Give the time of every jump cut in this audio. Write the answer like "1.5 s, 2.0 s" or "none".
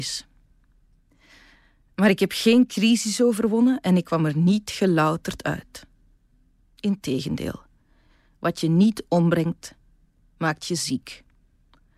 none